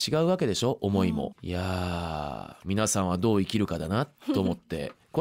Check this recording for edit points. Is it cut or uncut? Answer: cut